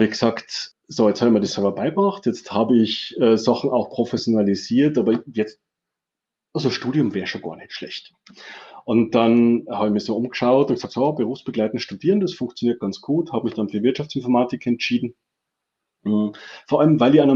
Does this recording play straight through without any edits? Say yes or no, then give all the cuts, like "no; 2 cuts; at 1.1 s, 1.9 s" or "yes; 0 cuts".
yes; 0 cuts